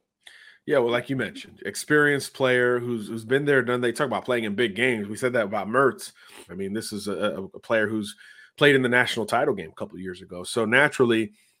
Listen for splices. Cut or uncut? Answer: cut